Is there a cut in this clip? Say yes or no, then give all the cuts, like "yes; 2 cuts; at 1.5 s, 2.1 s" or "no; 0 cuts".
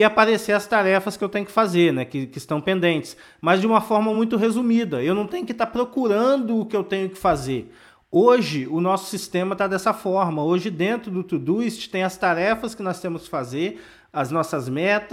no; 0 cuts